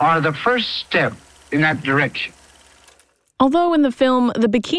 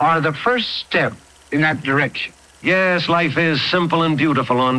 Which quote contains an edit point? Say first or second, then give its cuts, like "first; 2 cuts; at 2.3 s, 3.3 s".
second; 1 cut; at 2.5 s